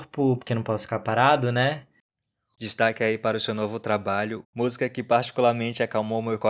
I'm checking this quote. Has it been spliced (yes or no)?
yes